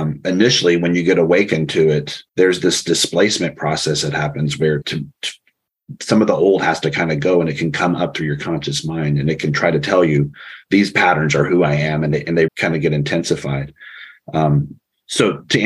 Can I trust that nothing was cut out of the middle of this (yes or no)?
no